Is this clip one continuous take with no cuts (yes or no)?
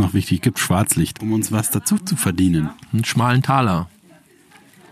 no